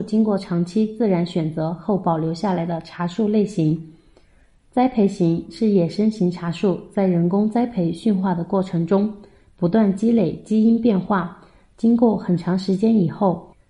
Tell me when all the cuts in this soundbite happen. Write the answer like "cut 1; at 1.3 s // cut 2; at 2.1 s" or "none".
none

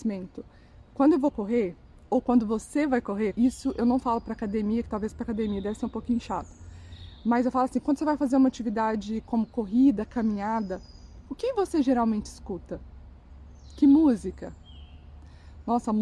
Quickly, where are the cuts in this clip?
cut 1; at 3.3 s

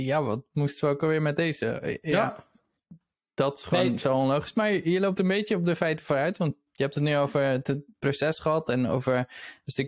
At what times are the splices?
none

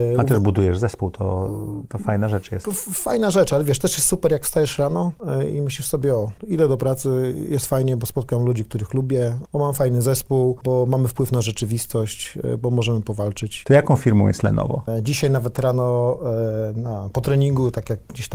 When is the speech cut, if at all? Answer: cut 1; at 13.6 s // cut 2; at 14.9 s

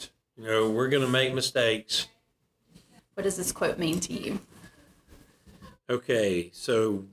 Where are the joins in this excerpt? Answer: cut 1; at 3.0 s

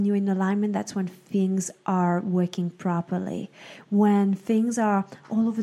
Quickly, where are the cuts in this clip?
none

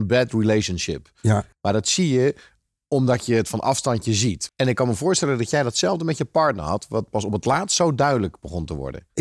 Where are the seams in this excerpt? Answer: cut 1; at 4.5 s

